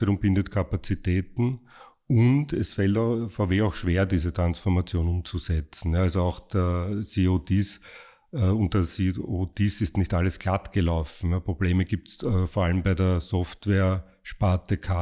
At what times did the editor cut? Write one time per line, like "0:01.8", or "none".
none